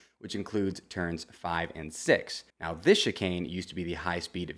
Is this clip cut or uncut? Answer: cut